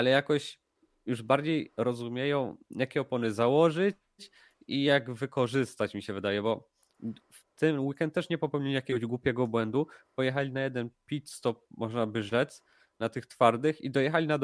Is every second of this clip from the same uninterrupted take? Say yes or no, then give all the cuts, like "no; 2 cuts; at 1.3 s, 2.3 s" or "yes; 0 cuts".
yes; 0 cuts